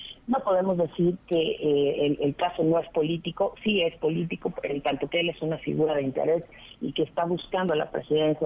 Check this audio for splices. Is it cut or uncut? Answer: uncut